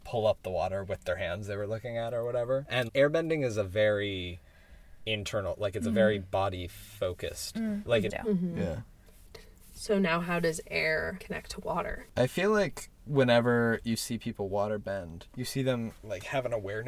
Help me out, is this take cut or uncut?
cut